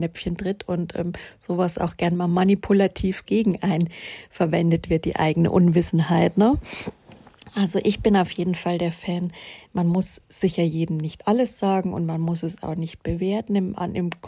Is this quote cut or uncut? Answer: uncut